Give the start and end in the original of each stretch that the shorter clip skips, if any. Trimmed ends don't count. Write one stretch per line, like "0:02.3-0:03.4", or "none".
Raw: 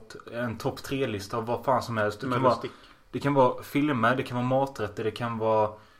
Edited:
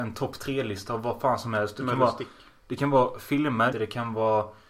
0:04.2-0:05.0